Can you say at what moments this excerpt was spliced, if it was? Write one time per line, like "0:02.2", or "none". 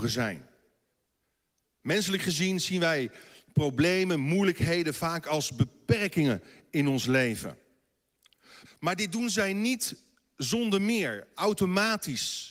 0:08.6